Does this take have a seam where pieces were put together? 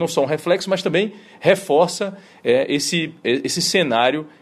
no; 0 cuts

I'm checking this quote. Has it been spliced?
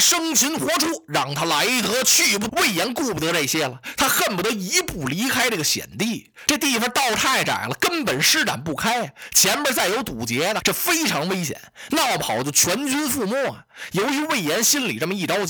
yes; 2 cuts; at 2.5 s, 10.6 s

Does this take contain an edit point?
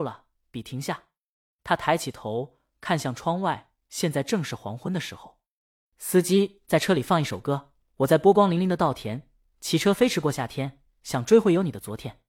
no; 0 cuts

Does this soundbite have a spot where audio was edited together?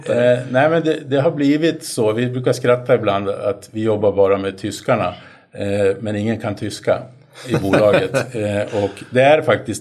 no; 0 cuts

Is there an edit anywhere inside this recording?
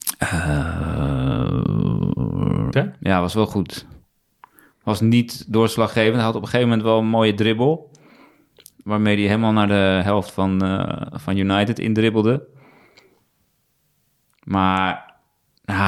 yes; 1 cut; at 2.7 s

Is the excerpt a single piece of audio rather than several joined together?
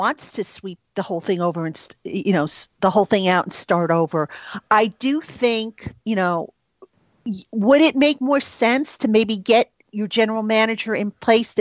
yes; 0 cuts

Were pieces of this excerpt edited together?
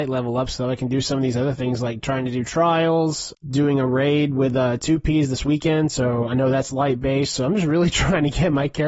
yes; 1 cut; at 3.3 s

